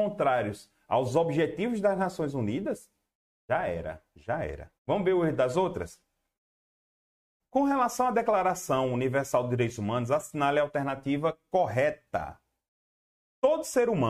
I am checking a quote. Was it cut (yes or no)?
yes